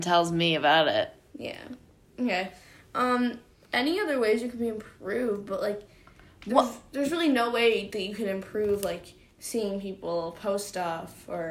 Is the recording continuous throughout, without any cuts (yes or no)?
yes